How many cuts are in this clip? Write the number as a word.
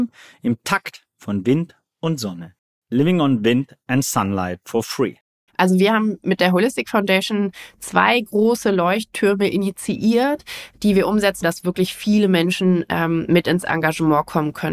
two